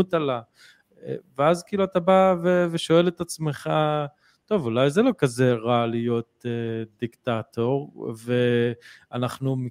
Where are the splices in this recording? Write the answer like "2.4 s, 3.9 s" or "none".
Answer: none